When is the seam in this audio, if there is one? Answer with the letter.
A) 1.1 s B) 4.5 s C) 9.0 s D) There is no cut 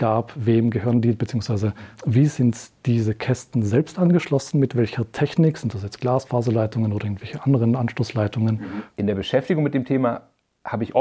C